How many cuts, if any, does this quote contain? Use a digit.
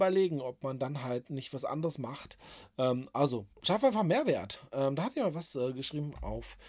1